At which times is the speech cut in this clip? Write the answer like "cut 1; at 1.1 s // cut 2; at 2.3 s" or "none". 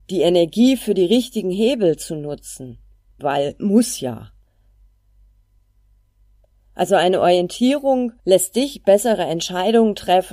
cut 1; at 3.2 s // cut 2; at 8.2 s